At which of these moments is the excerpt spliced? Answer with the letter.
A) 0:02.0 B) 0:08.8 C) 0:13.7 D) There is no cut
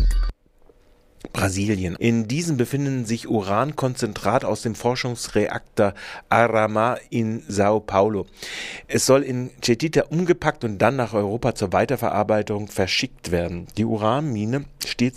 A